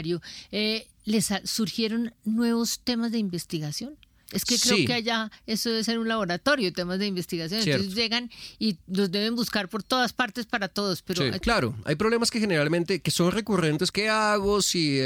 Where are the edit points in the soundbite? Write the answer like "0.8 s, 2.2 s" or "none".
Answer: 11.4 s, 13.9 s